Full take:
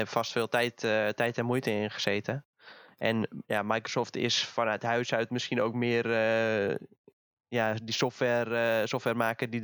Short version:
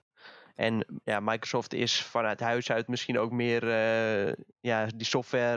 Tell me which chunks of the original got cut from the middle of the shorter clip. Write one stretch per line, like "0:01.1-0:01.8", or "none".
0:06.9-0:07.4